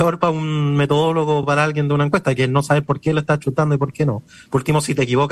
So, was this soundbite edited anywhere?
no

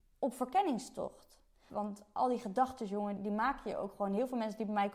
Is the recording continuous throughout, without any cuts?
no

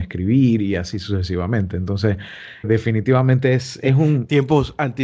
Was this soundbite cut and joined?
yes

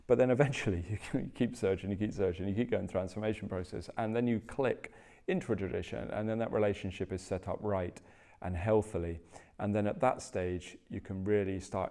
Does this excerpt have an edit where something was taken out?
no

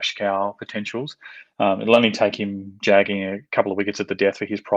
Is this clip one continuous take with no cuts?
yes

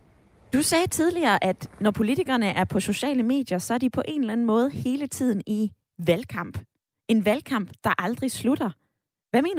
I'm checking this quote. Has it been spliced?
no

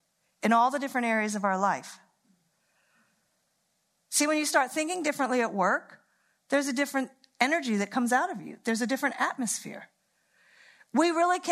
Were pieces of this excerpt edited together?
no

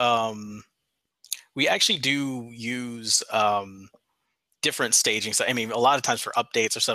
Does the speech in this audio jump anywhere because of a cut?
no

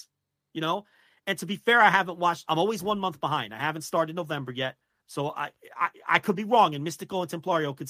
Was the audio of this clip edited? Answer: no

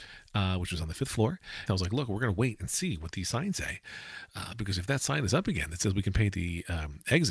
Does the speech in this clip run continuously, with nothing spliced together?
no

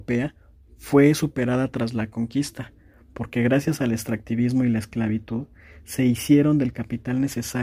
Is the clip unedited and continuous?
yes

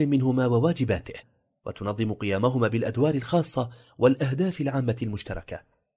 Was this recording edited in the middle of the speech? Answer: no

